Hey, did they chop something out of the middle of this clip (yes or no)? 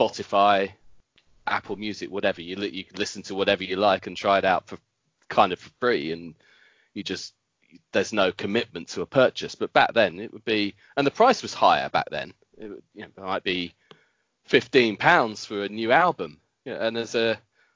no